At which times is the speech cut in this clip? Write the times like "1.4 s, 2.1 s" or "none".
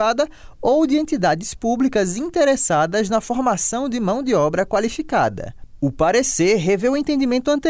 none